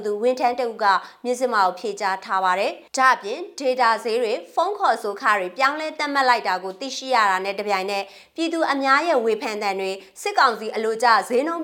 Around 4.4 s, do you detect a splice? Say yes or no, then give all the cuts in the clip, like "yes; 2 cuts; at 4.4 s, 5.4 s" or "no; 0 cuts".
no; 1 cut; at 2.9 s